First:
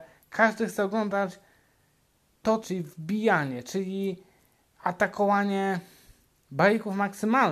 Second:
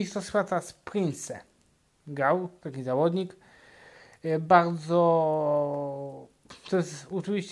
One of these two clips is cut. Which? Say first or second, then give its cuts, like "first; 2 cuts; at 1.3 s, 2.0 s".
first; 1 cut; at 2.6 s